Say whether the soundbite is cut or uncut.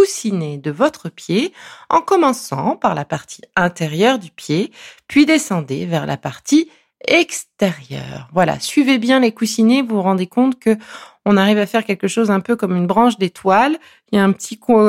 uncut